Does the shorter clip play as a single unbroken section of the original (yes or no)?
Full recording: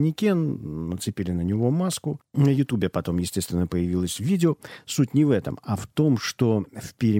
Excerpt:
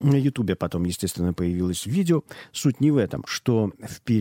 no